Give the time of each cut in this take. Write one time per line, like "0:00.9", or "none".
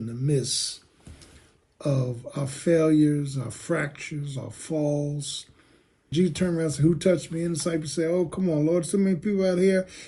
0:06.1